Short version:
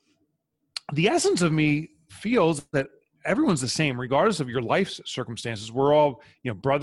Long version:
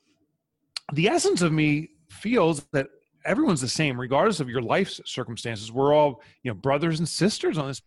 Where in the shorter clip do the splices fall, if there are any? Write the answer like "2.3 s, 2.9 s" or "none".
none